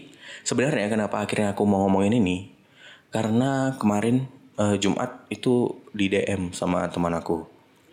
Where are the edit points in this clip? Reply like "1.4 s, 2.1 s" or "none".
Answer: none

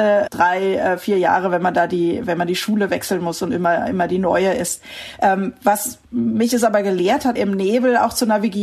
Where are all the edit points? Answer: 6.0 s, 7.4 s

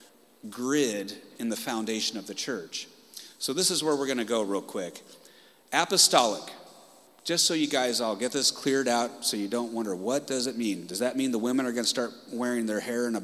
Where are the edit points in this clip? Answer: none

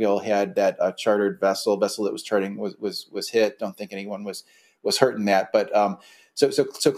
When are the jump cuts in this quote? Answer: none

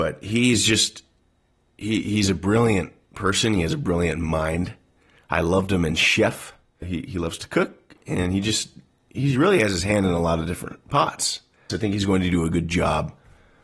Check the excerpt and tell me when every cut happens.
6.8 s, 11.7 s

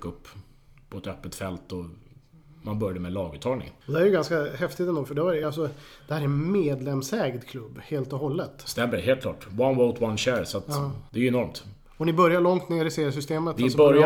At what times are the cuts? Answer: none

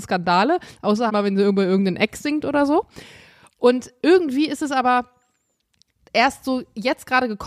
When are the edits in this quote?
1.1 s

